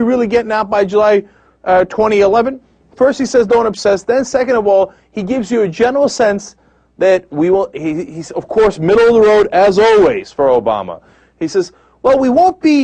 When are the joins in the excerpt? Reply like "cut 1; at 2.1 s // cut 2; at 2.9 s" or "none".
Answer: none